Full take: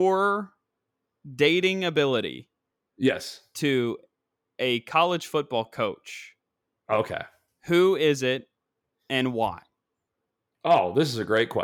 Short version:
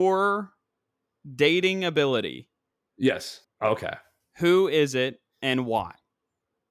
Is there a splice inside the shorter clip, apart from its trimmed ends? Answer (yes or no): yes